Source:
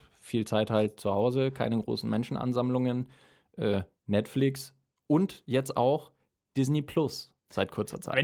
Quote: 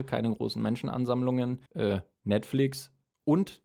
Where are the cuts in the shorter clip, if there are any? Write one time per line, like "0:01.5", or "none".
0:01.7